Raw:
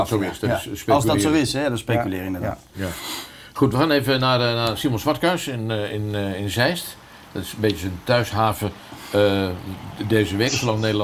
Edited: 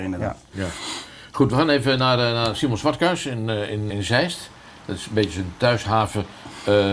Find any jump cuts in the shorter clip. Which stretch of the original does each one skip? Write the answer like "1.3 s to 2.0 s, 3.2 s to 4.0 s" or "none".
6.1 s to 6.4 s